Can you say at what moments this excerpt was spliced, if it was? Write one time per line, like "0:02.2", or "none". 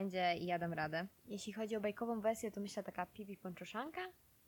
0:01.2